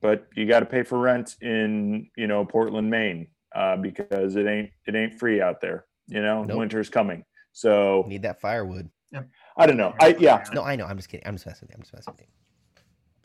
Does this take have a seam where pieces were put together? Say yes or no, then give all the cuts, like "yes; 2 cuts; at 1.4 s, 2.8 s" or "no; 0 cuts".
yes; 2 cuts; at 8.9 s, 10.5 s